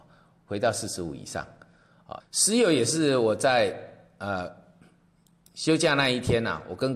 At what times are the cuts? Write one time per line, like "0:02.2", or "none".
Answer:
0:02.2